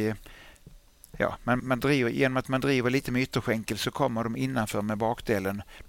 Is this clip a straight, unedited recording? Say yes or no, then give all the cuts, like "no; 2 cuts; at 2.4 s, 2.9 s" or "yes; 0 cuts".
no; 1 cut; at 1.6 s